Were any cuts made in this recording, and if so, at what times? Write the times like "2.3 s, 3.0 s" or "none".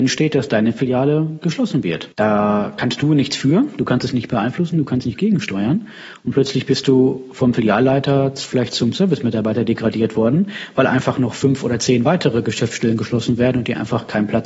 2.1 s